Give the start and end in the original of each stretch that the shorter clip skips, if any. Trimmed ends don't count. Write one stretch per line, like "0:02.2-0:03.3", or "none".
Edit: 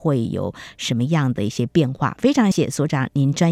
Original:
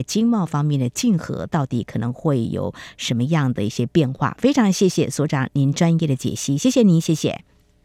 0:04.7-0:04.9